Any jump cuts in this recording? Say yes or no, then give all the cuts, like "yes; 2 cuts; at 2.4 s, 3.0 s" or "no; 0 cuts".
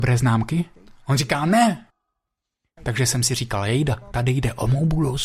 yes; 1 cut; at 2.8 s